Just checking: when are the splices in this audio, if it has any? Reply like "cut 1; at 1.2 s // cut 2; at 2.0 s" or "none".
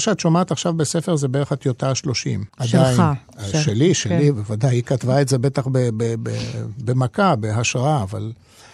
cut 1; at 2.5 s